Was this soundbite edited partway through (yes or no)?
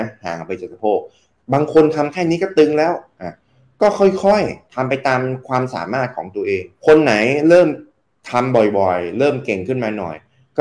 yes